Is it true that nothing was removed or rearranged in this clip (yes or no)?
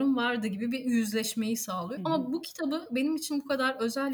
yes